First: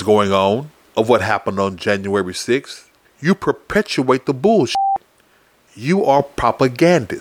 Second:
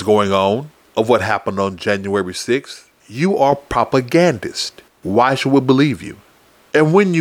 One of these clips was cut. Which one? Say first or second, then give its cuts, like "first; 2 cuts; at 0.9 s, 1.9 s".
second; 2 cuts; at 2.9 s, 4.9 s